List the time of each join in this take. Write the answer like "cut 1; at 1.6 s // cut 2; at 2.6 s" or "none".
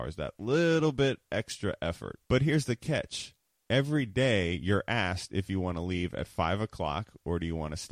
cut 1; at 2.2 s